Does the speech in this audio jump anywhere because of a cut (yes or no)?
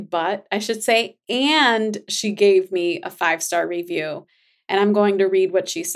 no